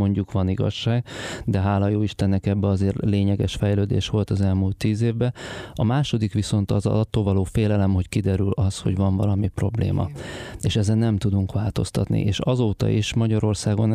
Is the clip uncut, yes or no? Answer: yes